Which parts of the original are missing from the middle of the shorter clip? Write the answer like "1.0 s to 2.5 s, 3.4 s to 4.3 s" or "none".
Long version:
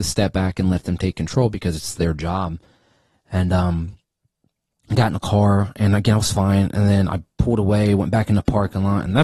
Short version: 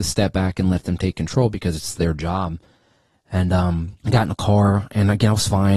4.0 s to 4.8 s